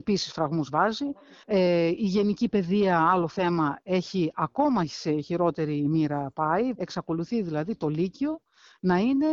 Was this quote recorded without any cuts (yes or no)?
no